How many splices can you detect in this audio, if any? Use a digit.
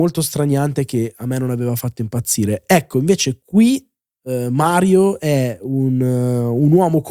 0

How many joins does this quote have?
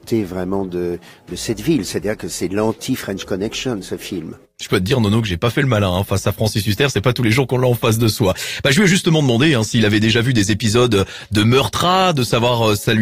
0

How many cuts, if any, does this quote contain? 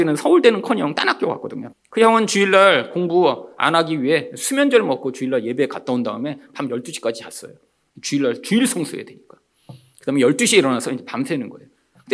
1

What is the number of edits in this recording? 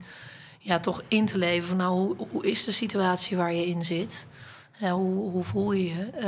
0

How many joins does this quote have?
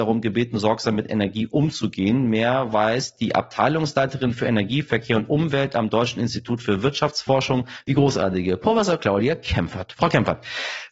1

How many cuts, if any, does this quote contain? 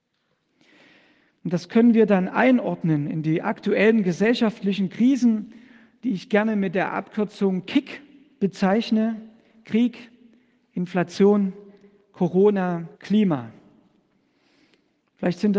1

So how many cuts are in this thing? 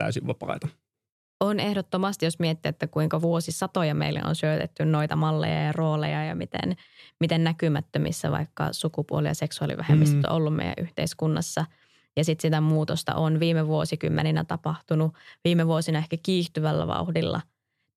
0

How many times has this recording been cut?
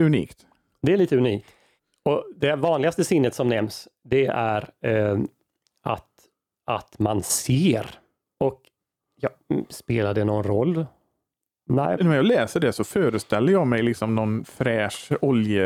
2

